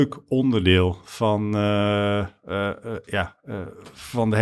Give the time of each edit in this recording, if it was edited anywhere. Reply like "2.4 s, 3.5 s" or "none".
none